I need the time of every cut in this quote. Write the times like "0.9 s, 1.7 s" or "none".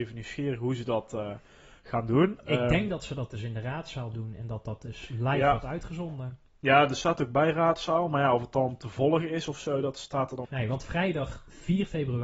10.4 s